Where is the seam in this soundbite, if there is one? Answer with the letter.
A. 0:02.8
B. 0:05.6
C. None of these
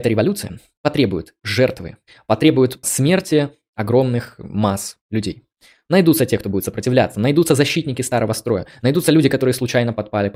A